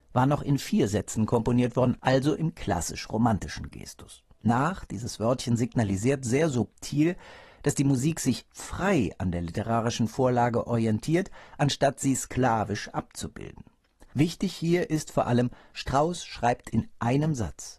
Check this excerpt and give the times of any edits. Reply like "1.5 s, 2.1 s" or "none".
4.4 s